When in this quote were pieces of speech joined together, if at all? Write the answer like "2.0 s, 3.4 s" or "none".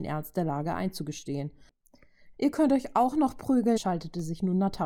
2.3 s, 3.8 s